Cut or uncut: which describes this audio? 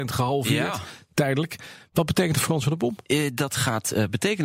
uncut